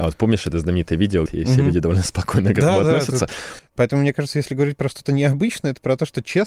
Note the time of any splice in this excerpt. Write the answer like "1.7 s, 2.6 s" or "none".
1.3 s, 3.6 s